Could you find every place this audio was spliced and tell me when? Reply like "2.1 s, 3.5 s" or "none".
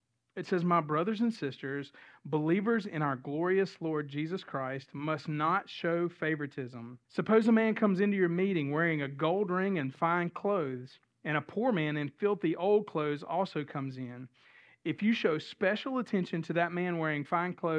7.0 s